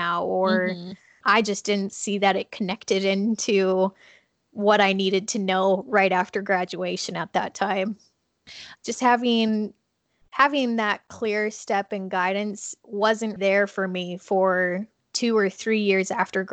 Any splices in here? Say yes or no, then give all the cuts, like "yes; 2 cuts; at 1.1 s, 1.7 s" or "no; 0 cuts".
yes; 3 cuts; at 1.2 s, 8.8 s, 13.4 s